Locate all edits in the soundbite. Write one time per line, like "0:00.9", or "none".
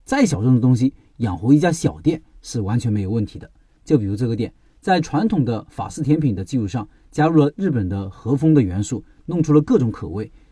0:03.8